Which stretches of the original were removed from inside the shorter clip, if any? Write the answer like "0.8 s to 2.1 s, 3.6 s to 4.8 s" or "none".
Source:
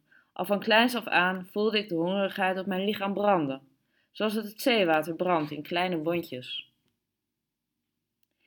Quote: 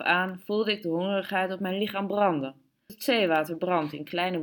4.0 s to 4.5 s